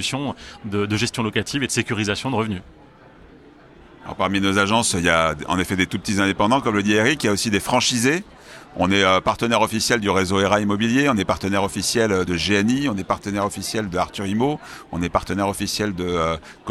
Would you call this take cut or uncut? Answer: uncut